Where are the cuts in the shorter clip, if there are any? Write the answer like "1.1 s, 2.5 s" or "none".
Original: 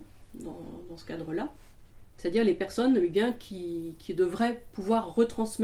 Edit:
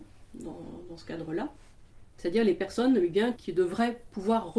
3.4 s